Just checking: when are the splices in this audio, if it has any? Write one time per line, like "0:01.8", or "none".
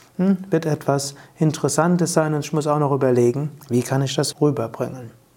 0:04.3